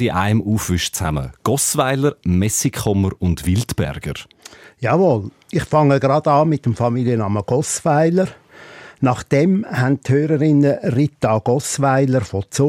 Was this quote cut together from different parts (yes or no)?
no